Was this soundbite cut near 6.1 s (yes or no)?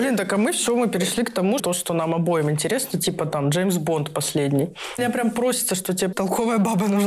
yes